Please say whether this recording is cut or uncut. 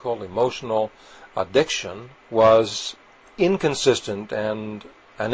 cut